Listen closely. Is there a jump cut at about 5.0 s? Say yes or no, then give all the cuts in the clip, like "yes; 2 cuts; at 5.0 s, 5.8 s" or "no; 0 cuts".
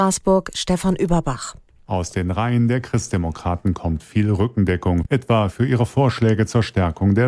no; 0 cuts